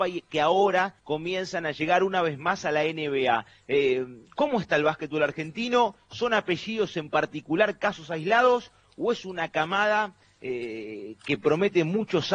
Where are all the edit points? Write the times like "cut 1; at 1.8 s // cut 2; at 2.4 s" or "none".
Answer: cut 1; at 1.0 s

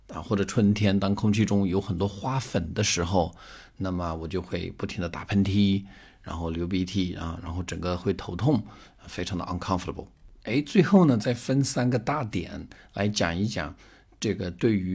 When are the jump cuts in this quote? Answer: none

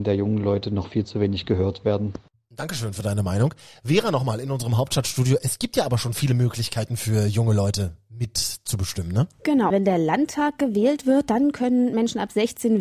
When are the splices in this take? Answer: cut 1; at 9.7 s

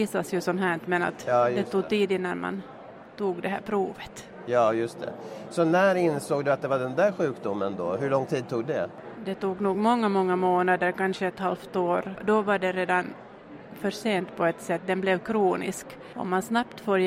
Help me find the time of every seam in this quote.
none

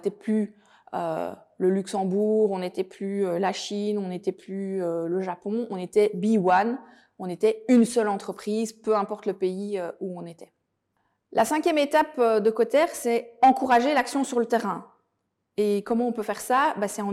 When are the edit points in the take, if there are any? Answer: none

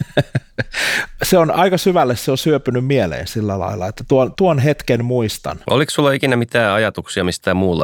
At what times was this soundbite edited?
cut 1; at 4.4 s // cut 2; at 5.7 s

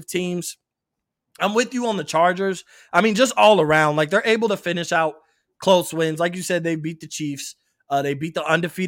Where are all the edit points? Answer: none

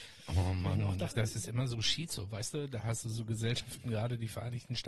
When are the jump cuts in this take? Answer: cut 1; at 1.1 s

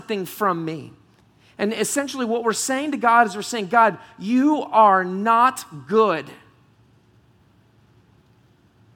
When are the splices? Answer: none

